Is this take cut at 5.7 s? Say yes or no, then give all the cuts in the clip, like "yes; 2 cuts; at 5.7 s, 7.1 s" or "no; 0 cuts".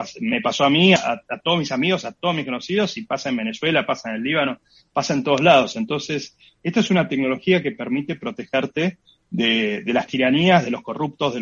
no; 1 cut; at 1.0 s